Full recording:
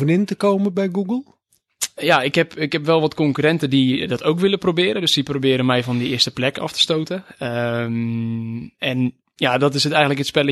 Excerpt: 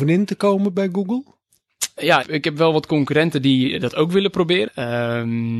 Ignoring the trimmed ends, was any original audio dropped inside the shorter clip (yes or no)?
yes